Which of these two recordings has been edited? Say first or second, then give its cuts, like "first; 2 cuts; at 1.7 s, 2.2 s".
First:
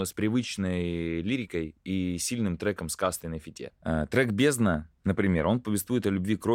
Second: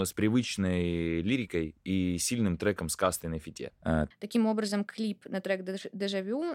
second; 1 cut; at 4.1 s